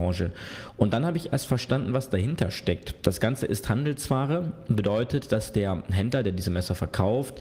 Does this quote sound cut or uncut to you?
uncut